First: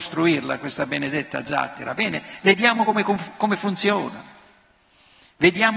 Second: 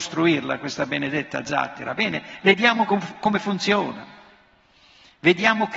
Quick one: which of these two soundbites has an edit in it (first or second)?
second